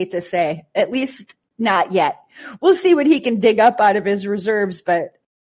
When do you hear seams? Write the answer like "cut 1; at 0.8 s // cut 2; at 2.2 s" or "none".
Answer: none